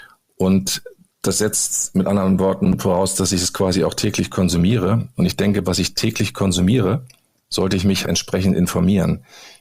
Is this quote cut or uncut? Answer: cut